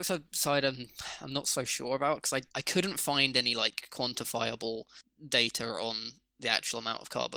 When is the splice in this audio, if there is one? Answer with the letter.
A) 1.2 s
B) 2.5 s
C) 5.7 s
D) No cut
B